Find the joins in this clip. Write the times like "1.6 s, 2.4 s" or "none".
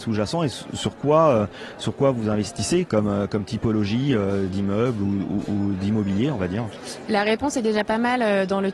none